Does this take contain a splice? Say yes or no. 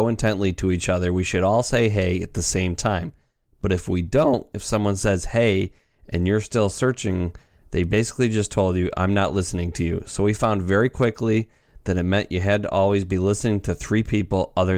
no